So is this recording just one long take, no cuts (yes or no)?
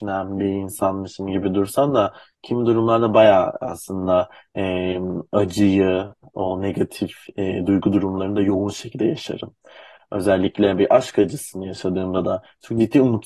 yes